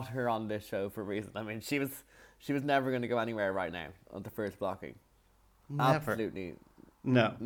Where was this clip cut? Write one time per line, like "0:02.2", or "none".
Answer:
none